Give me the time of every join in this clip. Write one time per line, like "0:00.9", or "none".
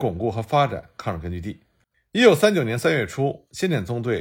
0:01.9

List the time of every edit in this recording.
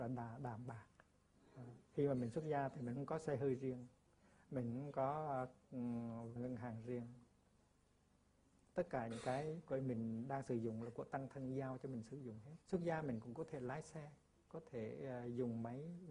0:06.4
0:12.6

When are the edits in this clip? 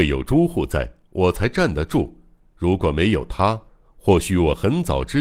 none

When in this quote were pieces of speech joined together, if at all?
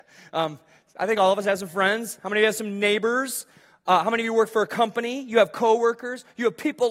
none

